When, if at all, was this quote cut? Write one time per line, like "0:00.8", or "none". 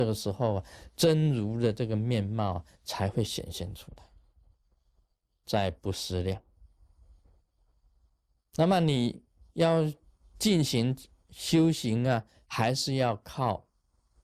0:05.4
0:12.3